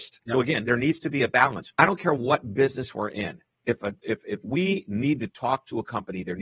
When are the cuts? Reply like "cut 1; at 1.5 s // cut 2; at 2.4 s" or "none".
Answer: none